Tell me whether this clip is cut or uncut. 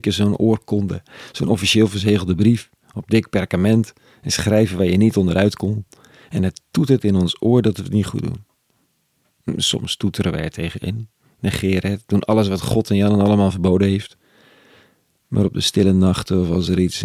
uncut